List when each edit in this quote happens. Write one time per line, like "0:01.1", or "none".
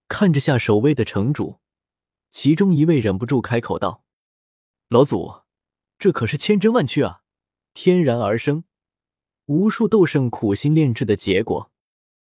0:07.7